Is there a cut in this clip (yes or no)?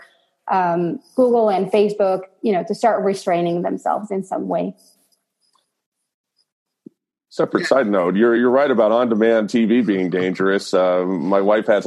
yes